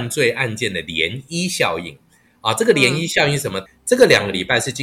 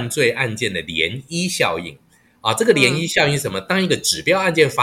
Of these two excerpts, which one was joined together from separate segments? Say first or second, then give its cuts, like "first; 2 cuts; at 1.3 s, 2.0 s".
first; 1 cut; at 3.7 s